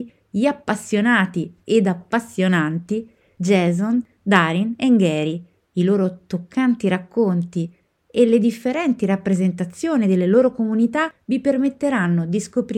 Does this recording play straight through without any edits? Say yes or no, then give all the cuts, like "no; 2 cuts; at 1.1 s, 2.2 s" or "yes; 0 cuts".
no; 1 cut; at 5.6 s